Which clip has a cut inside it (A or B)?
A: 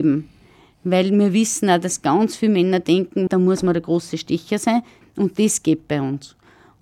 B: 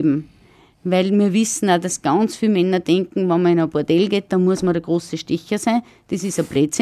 A